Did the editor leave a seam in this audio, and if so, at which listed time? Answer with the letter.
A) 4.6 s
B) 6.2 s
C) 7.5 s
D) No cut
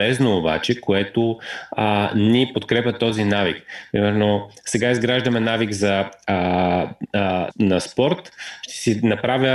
C